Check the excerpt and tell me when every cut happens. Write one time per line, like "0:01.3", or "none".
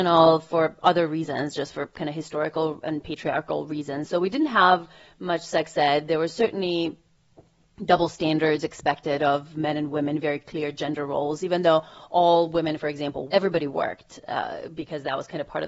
0:13.3